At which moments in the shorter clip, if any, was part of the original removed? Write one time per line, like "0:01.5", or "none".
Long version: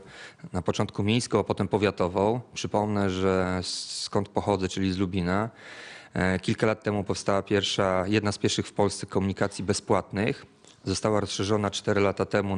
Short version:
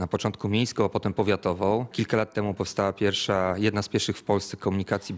0:01.9